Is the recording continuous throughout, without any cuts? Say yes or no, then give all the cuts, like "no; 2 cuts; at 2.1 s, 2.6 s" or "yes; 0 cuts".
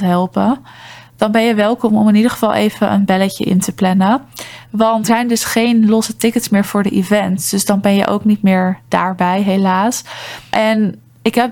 no; 1 cut; at 5.1 s